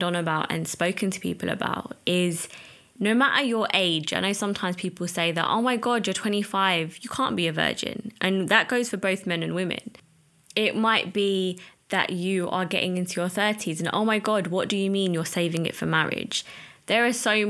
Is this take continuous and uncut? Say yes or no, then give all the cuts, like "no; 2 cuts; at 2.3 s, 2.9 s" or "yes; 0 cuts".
yes; 0 cuts